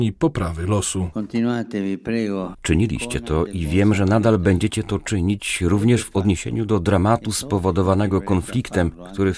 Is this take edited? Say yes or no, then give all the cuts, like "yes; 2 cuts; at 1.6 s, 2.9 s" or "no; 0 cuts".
yes; 1 cut; at 2.5 s